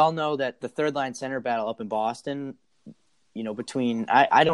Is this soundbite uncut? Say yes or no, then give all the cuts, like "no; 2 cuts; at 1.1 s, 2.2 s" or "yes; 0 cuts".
yes; 0 cuts